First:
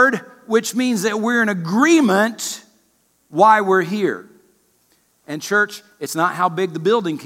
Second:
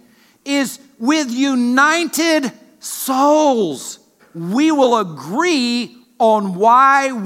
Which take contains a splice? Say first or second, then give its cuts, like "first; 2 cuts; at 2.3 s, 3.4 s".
second; 1 cut; at 4.2 s